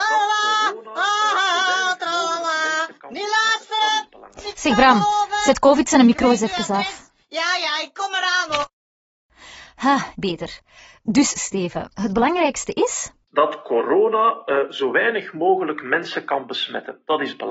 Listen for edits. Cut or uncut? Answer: uncut